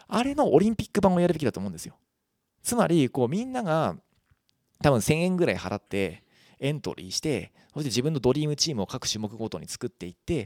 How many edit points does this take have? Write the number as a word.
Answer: zero